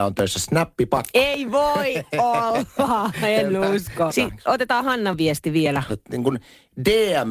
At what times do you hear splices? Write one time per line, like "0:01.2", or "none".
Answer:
0:04.1
0:05.9